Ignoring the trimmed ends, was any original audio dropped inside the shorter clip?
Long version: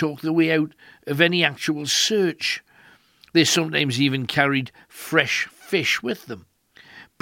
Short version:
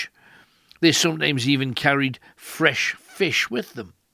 no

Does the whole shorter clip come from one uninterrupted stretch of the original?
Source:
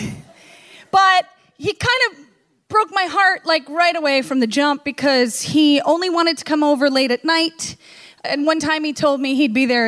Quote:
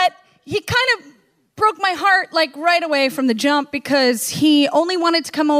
yes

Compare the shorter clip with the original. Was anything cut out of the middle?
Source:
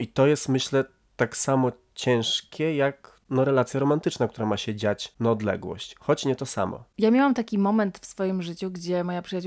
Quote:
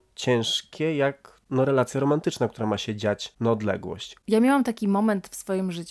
yes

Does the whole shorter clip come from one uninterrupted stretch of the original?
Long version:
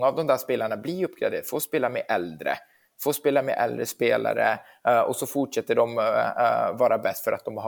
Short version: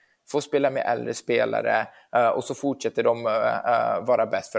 yes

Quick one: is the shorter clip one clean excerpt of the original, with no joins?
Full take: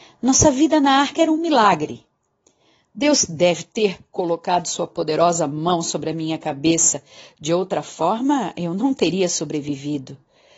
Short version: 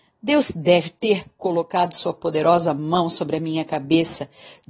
yes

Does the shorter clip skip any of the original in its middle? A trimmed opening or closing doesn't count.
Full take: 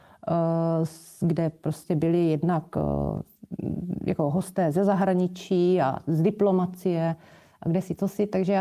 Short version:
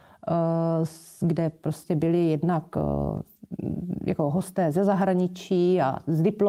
no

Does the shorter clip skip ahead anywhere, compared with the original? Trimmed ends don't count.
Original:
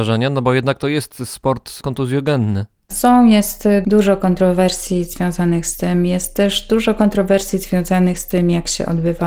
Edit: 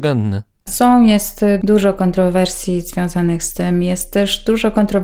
no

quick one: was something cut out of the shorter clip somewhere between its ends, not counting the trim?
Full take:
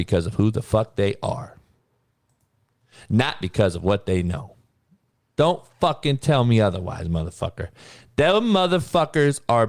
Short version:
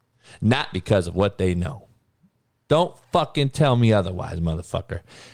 no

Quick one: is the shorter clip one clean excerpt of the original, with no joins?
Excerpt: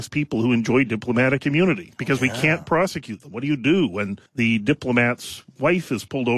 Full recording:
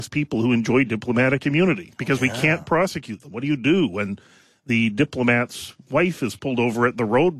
no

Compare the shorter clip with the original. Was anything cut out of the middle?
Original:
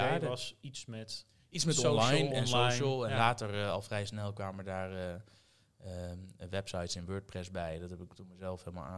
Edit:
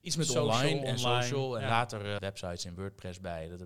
yes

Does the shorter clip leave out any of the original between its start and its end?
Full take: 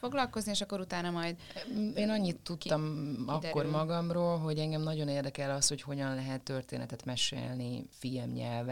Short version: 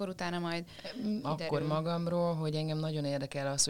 yes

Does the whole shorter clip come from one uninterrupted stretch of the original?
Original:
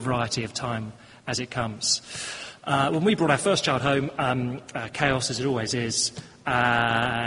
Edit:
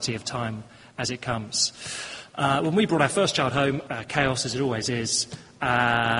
no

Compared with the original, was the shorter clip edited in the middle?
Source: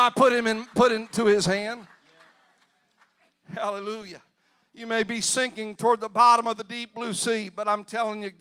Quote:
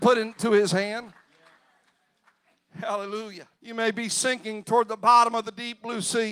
yes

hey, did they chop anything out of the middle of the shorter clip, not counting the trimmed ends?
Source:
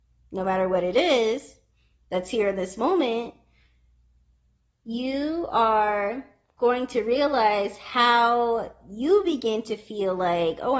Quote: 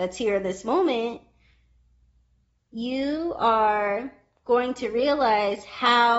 no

